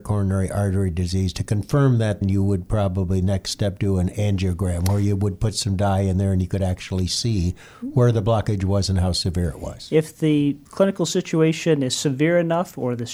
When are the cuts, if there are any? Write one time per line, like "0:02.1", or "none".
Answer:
0:02.2
0:10.6

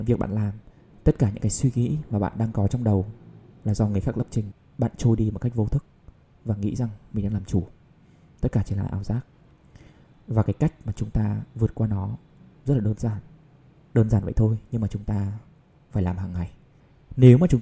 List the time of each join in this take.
0:13.9

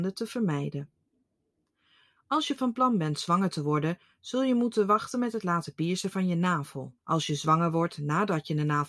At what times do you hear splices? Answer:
0:02.2
0:07.0

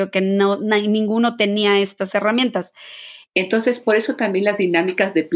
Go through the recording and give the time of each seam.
0:03.3

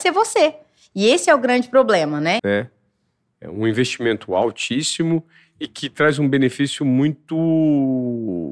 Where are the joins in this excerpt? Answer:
0:02.4

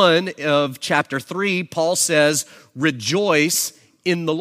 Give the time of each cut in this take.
none

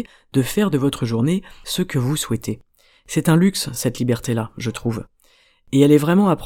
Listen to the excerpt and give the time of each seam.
none

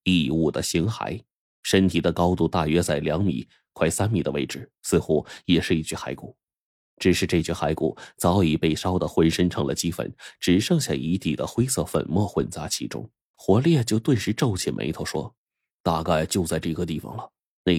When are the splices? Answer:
0:13.3
0:15.4

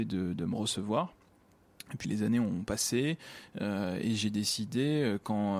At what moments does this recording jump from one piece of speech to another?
0:02.0

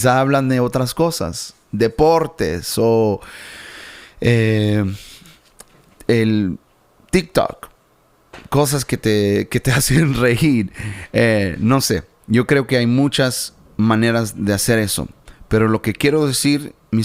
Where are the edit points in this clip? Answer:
none

